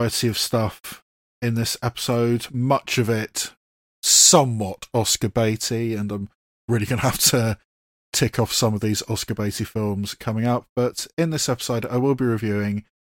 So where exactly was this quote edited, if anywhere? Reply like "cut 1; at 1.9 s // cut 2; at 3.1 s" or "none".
none

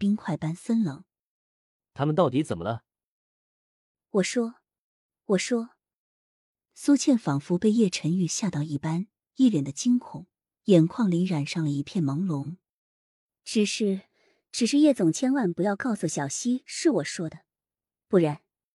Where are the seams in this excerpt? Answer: none

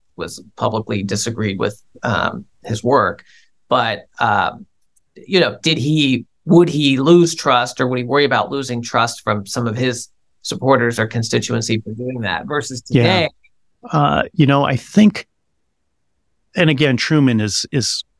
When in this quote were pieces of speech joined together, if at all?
cut 1; at 13.8 s

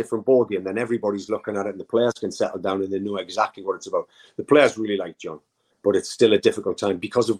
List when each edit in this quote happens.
cut 1; at 5.7 s

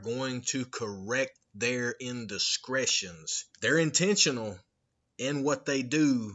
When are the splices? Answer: cut 1; at 3.5 s

